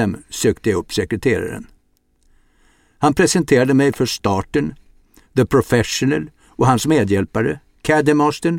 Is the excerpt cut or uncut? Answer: uncut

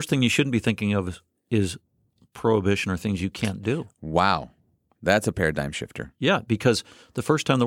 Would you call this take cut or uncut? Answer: uncut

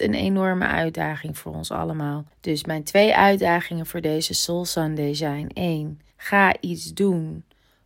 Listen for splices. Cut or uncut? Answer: cut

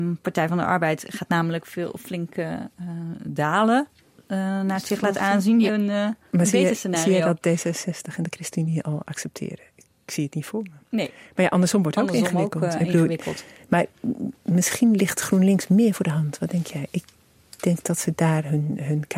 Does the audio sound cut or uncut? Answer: cut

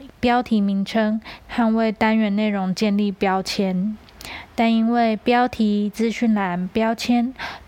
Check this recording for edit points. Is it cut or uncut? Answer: cut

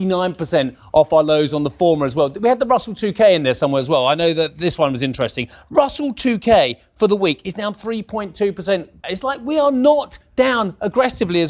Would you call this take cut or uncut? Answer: cut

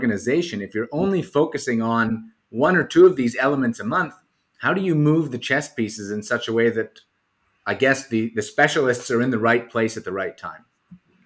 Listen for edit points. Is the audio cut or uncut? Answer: uncut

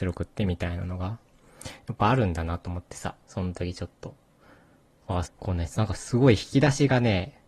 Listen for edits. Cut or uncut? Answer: cut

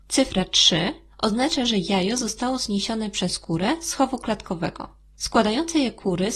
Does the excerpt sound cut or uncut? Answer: uncut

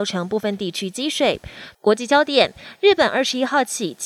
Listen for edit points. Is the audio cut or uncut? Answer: cut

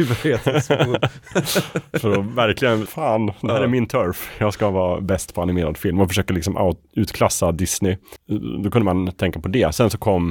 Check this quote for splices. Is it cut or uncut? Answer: cut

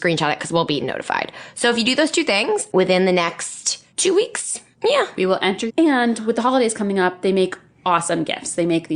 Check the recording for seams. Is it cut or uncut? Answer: cut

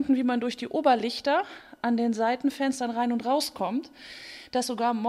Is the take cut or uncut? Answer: uncut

